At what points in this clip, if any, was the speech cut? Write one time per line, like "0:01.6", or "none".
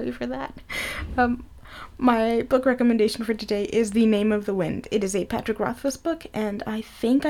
none